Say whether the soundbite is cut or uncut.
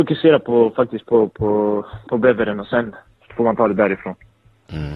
uncut